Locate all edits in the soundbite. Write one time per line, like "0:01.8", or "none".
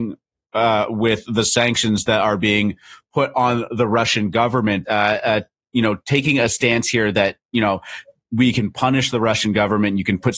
0:04.8